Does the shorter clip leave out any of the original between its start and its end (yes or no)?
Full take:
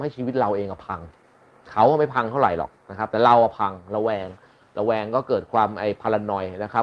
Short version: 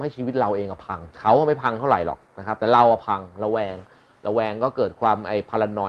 yes